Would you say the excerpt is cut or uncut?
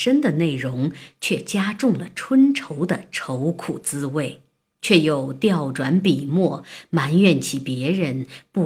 cut